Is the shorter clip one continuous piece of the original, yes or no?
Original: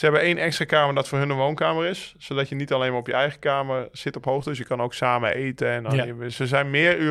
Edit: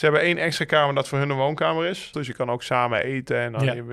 no